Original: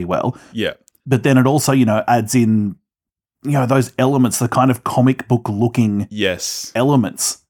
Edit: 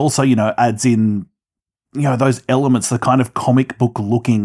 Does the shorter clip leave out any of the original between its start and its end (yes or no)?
no